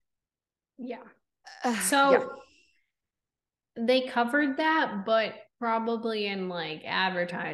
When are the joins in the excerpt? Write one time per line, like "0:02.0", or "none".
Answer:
none